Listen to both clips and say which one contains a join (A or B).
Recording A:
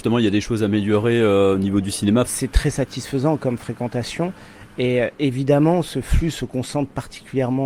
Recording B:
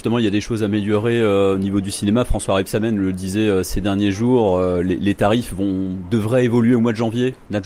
A